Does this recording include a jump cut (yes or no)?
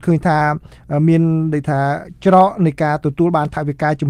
no